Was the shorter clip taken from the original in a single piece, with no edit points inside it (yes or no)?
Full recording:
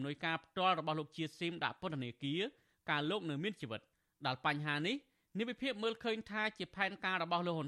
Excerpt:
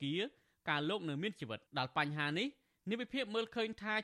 no